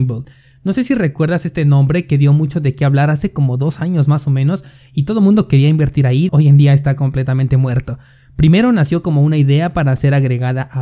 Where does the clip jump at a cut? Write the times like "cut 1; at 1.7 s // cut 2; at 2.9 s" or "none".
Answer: cut 1; at 6.3 s